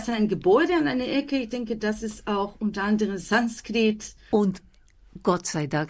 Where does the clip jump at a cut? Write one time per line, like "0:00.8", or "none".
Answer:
0:04.3